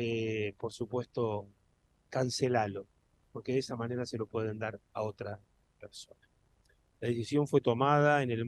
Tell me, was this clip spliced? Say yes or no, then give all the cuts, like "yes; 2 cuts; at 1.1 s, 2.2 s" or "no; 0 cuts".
yes; 2 cuts; at 2.0 s, 6.9 s